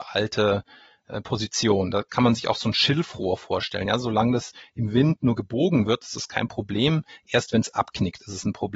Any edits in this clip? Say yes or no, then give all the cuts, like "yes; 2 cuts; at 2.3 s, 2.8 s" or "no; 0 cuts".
no; 0 cuts